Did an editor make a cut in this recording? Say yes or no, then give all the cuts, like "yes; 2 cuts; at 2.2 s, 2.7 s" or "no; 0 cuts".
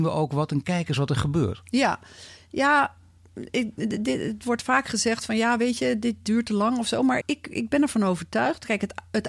yes; 1 cut; at 7.2 s